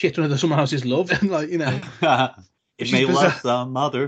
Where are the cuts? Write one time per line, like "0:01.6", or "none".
0:01.1